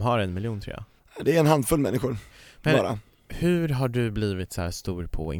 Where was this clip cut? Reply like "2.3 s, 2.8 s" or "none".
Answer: none